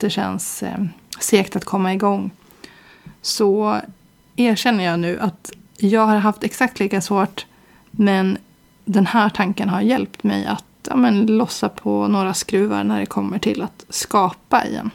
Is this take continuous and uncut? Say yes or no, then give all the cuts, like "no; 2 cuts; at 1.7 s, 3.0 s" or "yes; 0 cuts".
yes; 0 cuts